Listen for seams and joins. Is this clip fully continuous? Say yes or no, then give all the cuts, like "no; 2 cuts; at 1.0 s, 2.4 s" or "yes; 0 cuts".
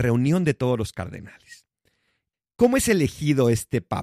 no; 1 cut; at 2.3 s